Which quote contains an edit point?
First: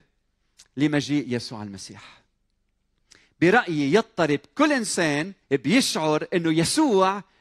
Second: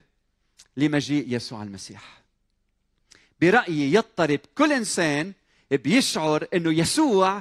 first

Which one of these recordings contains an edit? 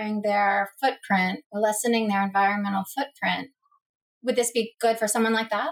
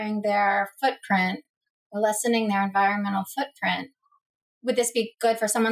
first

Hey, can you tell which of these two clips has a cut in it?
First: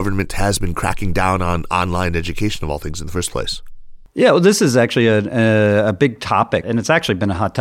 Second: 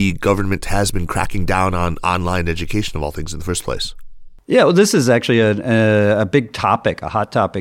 first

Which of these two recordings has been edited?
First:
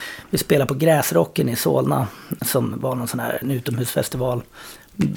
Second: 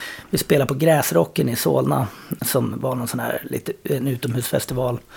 first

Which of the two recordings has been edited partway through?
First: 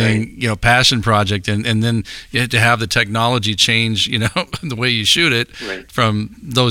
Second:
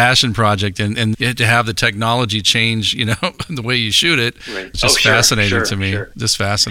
second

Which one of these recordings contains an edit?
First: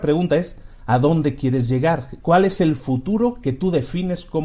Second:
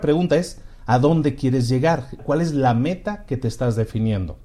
second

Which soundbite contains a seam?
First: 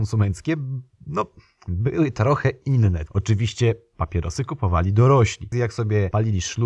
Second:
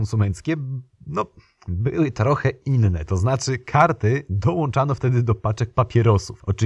first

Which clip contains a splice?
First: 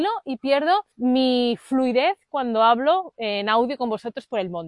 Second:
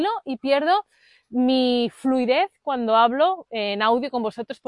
first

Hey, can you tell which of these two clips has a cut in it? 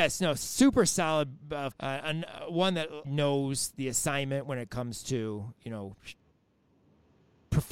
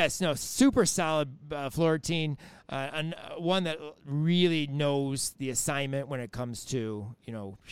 first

